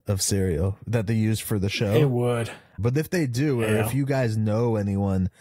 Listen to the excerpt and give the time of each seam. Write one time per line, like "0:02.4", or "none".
0:02.8